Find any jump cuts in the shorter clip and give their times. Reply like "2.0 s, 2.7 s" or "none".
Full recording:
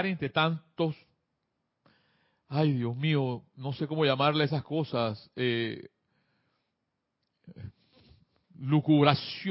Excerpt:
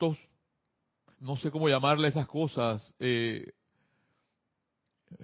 1.1 s